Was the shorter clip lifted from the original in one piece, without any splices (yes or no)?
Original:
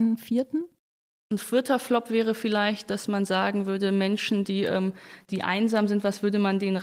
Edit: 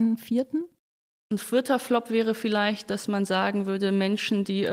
yes